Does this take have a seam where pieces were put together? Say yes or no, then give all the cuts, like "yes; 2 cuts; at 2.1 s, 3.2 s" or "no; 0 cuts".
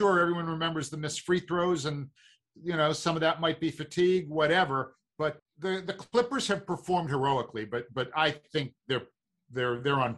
yes; 1 cut; at 5.4 s